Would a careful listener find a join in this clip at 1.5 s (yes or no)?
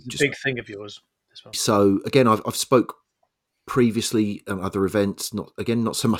yes